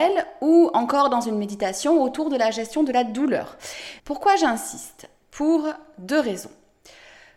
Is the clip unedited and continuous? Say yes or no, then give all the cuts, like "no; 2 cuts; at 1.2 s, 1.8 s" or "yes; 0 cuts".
no; 1 cut; at 4.0 s